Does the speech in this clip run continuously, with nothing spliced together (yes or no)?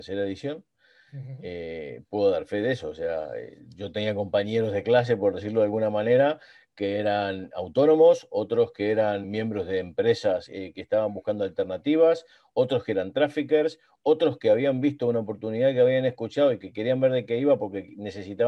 no